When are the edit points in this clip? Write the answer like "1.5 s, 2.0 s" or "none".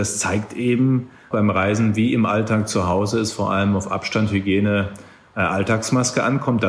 1.3 s